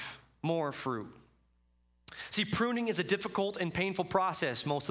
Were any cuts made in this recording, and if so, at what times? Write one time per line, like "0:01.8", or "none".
none

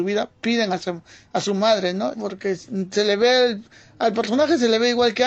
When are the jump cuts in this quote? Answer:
0:02.1

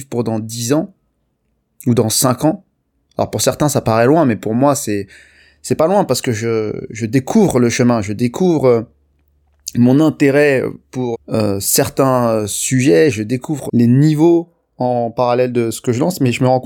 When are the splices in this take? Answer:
0:11.1
0:13.7

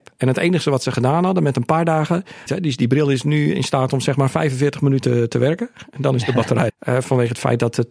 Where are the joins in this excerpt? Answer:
0:02.5
0:06.7

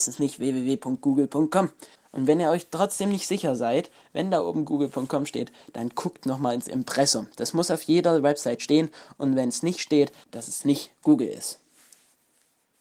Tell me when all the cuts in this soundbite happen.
0:02.0
0:10.2

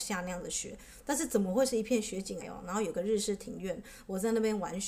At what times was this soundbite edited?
0:02.4

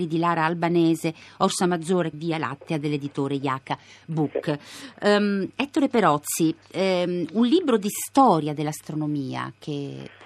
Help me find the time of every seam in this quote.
0:02.1

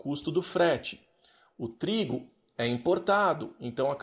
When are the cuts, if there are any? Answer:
none

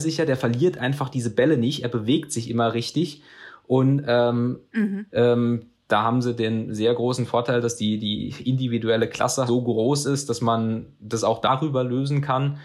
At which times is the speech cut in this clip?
0:05.1
0:09.5

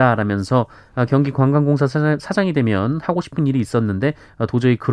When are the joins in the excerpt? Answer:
none

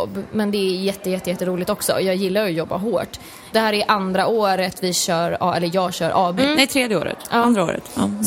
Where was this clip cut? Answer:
0:03.5
0:06.4

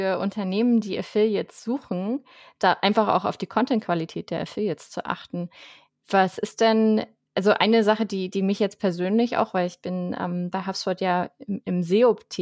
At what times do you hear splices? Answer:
none

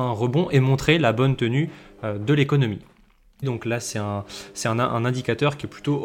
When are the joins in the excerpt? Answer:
0:03.4

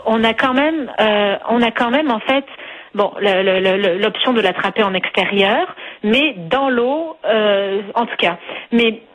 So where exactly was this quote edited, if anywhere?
none

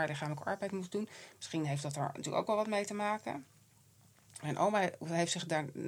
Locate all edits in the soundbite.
none

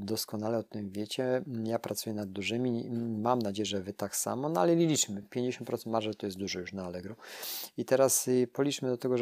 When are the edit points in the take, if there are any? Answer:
none

